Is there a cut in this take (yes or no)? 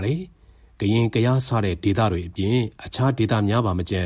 no